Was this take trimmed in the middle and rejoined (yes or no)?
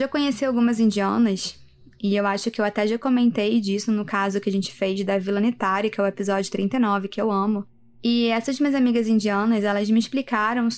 no